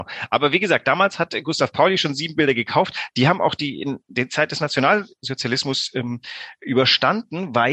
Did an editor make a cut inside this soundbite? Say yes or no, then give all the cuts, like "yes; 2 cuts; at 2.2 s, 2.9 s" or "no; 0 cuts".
no; 0 cuts